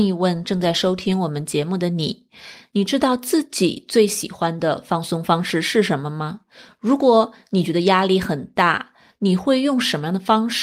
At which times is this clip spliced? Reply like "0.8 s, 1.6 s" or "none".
9.1 s